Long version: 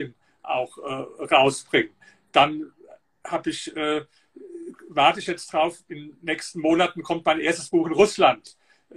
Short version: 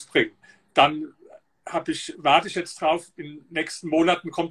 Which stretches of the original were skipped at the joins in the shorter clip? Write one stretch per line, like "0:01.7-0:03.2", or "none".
0:03.7-0:04.9